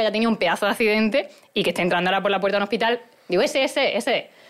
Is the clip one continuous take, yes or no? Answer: yes